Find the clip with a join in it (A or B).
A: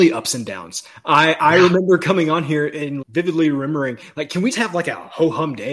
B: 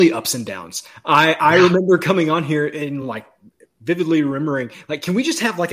A